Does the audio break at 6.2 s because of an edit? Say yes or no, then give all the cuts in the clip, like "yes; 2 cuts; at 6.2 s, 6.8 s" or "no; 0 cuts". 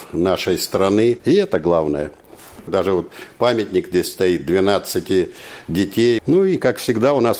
yes; 3 cuts; at 1.2 s, 2.7 s, 6.2 s